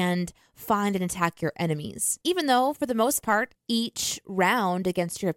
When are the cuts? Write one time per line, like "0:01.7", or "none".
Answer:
0:03.6